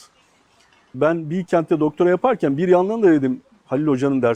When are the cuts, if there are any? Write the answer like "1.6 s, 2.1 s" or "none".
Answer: 0.9 s